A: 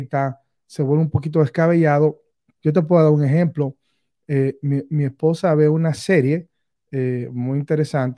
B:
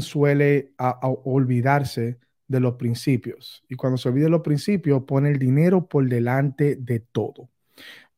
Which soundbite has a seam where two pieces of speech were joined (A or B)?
A